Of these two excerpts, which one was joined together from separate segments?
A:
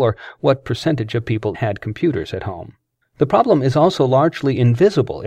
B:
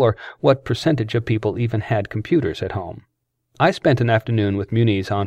A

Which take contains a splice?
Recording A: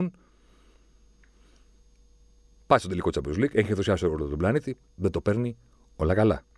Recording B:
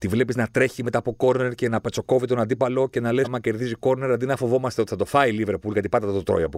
B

